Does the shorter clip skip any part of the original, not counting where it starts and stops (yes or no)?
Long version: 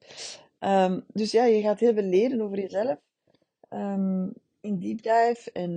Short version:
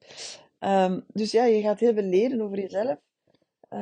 no